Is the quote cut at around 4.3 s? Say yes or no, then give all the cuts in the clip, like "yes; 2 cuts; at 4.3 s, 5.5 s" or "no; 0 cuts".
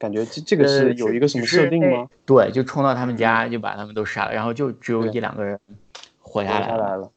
no; 1 cut; at 2.1 s